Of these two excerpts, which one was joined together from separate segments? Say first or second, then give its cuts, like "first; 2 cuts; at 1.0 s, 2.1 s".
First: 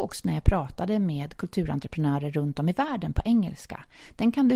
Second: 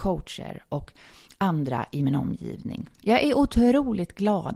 second; 1 cut; at 2.9 s